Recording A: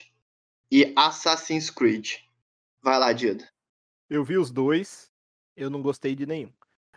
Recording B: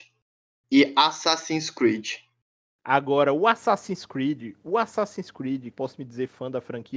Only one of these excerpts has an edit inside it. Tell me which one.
B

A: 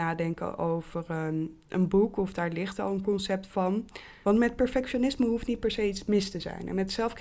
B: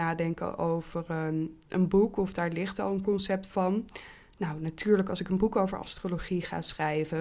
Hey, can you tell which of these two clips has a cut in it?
A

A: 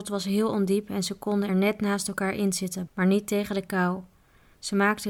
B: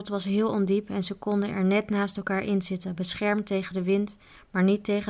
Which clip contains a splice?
A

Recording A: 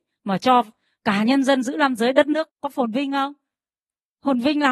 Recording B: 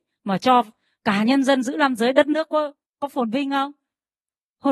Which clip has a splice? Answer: A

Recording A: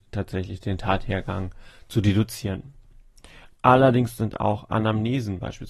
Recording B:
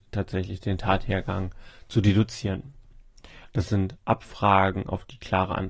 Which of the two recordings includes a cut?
B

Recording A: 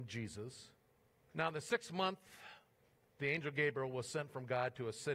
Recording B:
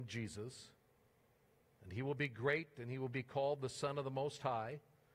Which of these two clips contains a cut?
A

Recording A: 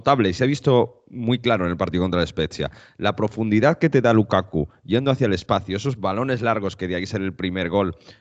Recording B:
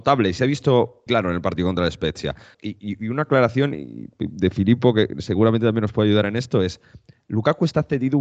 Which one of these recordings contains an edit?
B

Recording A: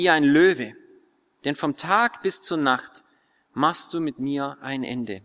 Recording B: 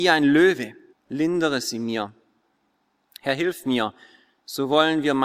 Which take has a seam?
B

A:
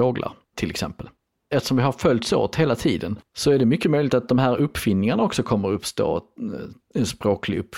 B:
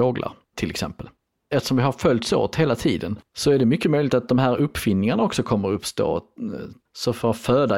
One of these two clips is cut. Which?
B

